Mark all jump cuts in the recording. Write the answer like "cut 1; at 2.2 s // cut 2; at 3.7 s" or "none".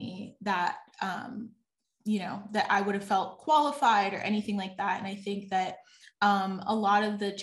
none

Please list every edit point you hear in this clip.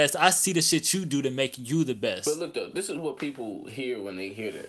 none

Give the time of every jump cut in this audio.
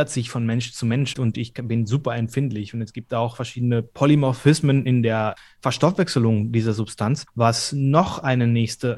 cut 1; at 1.1 s

